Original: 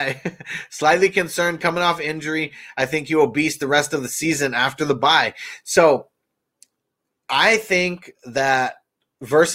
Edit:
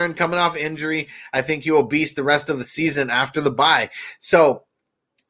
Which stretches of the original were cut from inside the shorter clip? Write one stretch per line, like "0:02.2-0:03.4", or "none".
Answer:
none